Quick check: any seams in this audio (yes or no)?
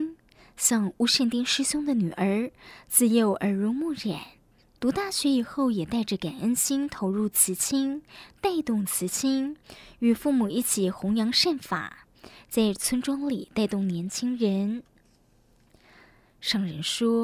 no